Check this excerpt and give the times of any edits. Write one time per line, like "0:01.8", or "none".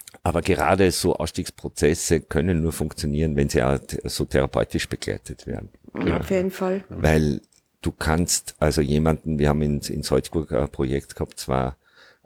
none